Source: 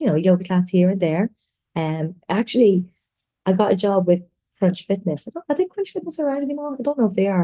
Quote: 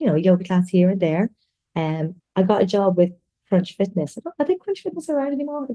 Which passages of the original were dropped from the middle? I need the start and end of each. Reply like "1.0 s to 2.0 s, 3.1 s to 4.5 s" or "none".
2.2 s to 3.3 s